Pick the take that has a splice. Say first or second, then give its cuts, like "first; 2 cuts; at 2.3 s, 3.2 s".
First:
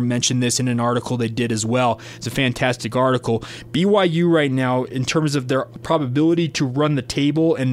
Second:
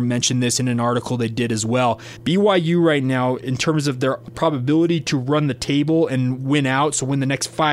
second; 1 cut; at 2.2 s